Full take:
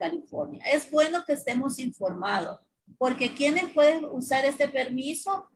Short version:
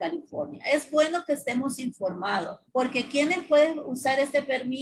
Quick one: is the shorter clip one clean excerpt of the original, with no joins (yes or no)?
no